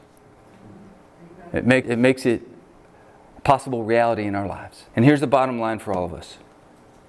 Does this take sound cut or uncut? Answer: cut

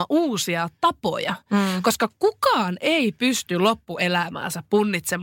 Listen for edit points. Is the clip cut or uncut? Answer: uncut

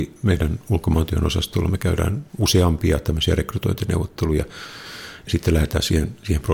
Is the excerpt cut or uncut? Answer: cut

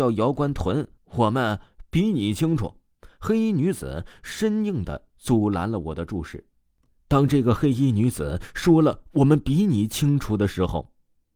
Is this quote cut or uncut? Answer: cut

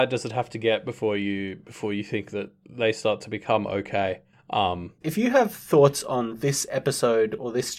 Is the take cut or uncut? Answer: cut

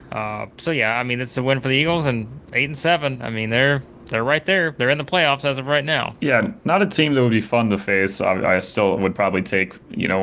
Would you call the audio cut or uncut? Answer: uncut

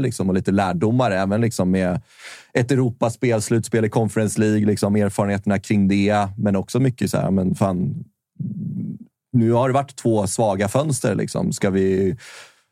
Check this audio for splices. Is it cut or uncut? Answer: uncut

